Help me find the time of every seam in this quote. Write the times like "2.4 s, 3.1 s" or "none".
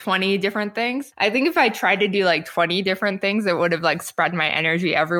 none